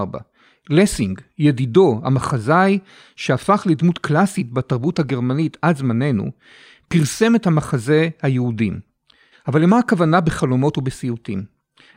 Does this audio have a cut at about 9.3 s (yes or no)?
yes